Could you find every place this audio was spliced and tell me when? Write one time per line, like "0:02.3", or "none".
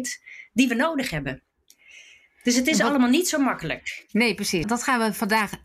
0:04.6